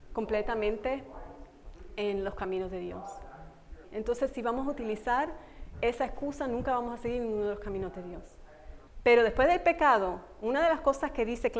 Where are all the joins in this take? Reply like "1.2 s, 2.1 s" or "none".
3.8 s, 8.9 s